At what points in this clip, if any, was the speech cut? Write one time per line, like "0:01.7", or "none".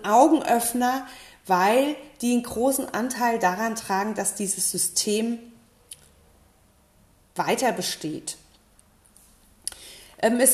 none